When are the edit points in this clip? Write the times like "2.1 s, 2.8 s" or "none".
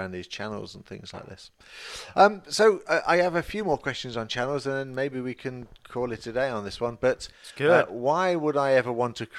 none